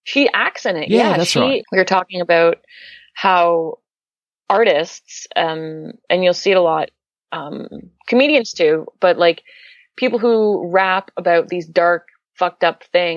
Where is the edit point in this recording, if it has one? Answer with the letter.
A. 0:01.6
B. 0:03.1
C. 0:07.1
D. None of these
A